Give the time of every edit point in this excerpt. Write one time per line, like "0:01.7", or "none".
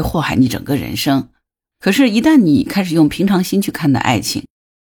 0:01.7